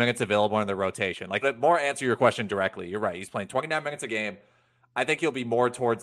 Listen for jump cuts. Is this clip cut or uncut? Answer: cut